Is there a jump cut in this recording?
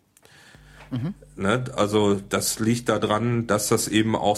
no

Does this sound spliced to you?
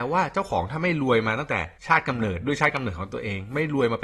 yes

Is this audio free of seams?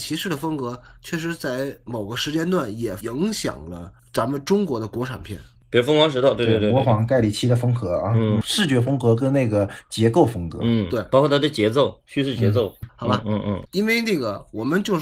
no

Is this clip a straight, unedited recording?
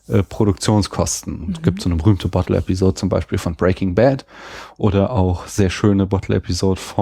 yes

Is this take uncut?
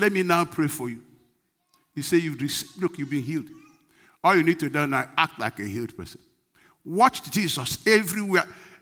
yes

